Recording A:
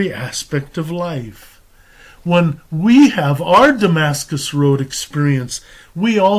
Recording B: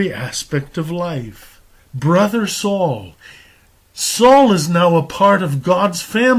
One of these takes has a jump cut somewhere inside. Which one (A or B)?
B